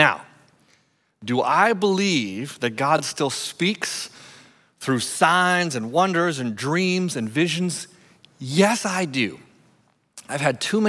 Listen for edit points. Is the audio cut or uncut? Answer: uncut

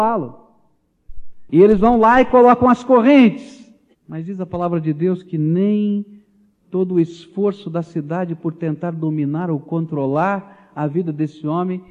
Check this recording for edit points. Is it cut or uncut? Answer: cut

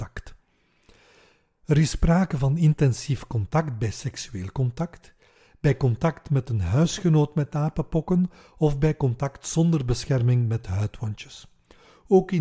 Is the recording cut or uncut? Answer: uncut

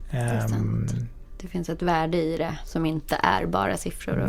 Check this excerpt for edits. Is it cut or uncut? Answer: uncut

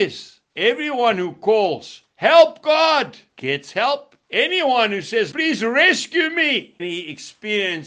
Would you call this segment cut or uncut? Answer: cut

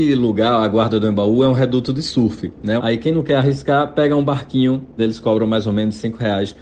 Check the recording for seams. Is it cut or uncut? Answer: cut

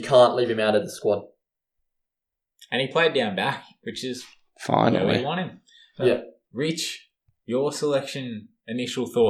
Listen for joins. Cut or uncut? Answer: uncut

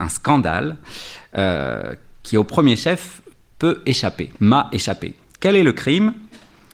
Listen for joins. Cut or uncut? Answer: cut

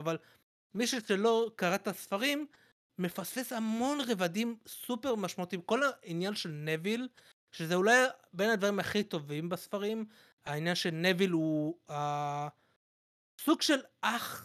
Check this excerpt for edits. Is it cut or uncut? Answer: uncut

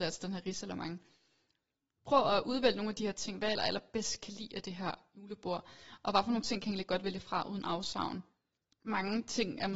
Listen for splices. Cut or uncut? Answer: cut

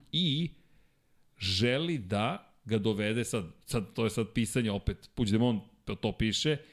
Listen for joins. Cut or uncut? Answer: uncut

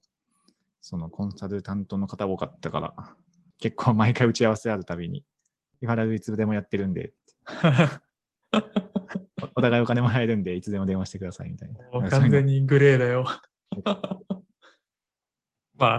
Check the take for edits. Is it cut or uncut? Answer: uncut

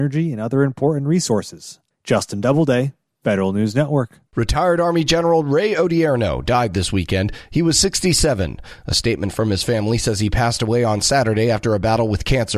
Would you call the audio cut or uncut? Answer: uncut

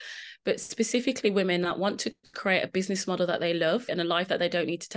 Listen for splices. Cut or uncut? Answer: cut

